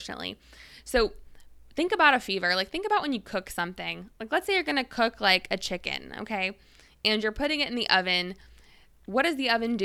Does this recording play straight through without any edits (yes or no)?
yes